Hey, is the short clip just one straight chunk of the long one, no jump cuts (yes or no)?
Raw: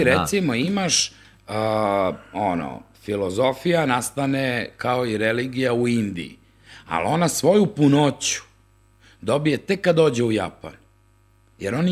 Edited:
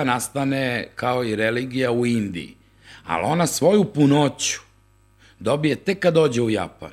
yes